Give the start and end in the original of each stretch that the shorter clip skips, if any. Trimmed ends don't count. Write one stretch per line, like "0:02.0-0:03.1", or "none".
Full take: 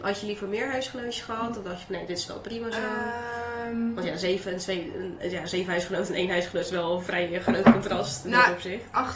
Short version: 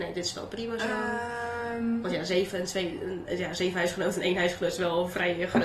none